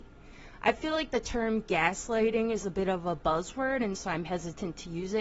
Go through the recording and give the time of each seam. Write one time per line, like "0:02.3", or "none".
none